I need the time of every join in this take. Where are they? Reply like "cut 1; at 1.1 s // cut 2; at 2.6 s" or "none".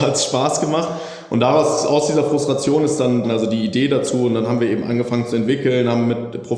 cut 1; at 3.2 s